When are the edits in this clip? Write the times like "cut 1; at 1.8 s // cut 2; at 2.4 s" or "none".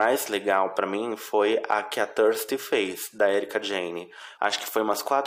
cut 1; at 4.4 s